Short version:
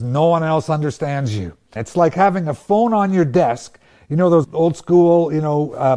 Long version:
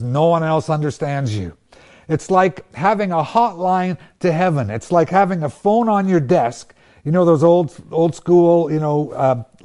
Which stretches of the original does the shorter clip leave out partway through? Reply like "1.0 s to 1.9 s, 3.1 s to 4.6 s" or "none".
1.8 s to 4.7 s, 7.4 s to 7.8 s